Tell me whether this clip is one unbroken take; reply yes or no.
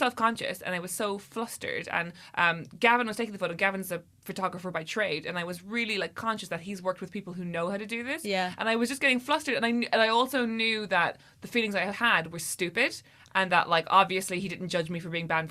yes